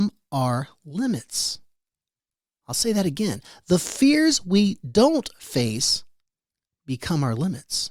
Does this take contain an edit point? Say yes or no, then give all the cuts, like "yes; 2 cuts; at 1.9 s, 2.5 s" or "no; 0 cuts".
no; 0 cuts